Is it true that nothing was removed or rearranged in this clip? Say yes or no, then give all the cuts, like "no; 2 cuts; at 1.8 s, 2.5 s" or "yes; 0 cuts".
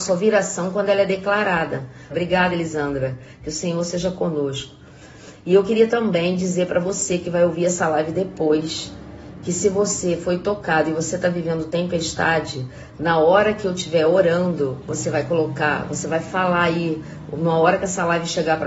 no; 1 cut; at 2.1 s